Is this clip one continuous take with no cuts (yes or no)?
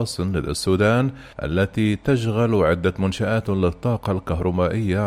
no